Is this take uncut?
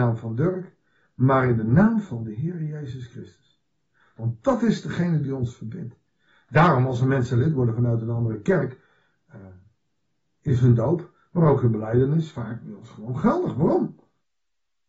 yes; 0 cuts

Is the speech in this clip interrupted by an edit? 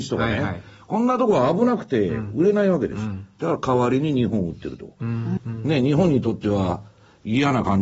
yes; 1 cut; at 5.4 s

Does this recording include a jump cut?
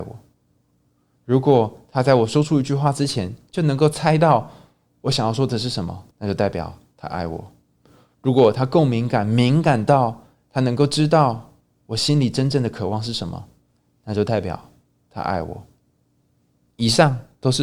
yes; 1 cut; at 6.1 s

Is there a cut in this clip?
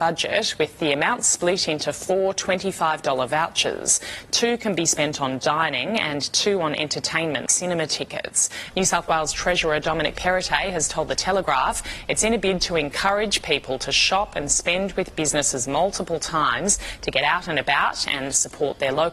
yes; 2 cuts; at 7.5 s, 8.7 s

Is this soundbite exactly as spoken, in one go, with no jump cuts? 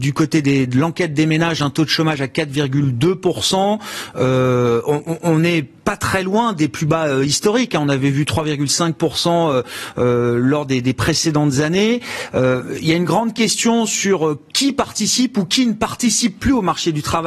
yes; 0 cuts

